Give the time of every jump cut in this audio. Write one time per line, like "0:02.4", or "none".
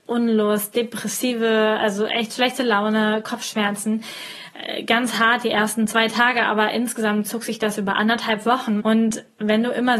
0:08.8